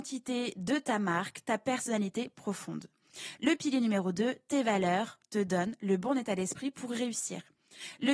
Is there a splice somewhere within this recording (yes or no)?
no